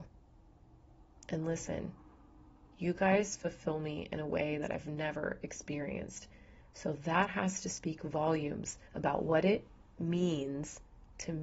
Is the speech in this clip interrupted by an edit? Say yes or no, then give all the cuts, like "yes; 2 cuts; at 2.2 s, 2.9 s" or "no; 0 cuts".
yes; 2 cuts; at 6.6 s, 8.9 s